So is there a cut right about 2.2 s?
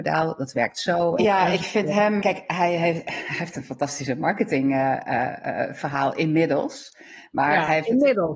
yes; 2 cuts; at 1.2 s, 2.2 s

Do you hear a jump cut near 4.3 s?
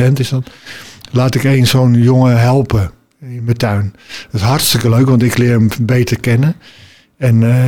no; 0 cuts

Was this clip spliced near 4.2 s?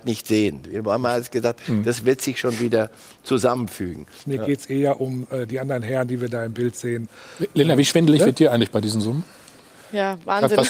yes; 1 cut; at 4.2 s

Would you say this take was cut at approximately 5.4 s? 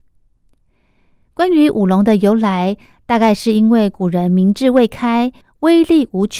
yes; 1 cut; at 5.4 s

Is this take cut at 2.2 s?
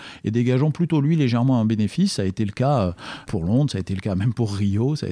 no; 0 cuts

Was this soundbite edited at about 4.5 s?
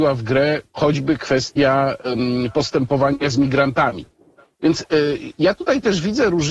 yes; 1 cut; at 4.5 s

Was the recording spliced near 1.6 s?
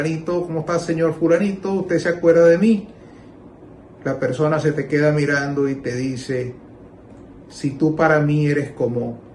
no; 1 cut; at 7.3 s

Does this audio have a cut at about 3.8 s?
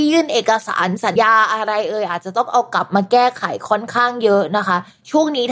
no; 1 cut; at 1.2 s

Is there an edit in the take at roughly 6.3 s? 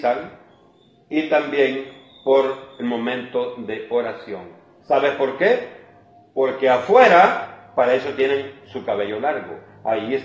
no; 1 cut; at 4.8 s

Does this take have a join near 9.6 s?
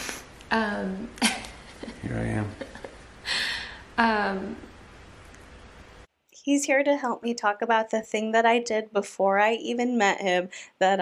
no; 0 cuts

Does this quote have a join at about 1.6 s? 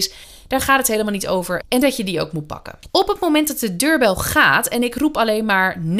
yes; 2 cuts; at 1.6 s, 2.9 s

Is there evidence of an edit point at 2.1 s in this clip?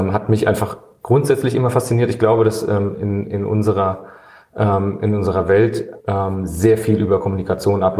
no; 1 cut; at 6.0 s

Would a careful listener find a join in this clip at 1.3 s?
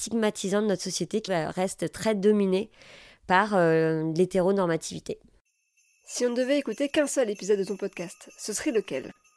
yes; 1 cut; at 1.3 s

